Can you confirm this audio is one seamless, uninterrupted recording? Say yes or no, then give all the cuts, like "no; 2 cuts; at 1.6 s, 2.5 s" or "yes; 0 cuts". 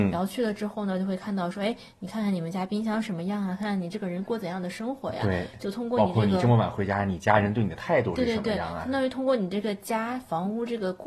yes; 0 cuts